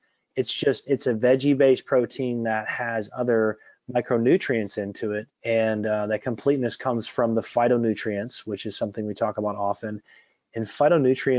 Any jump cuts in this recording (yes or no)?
yes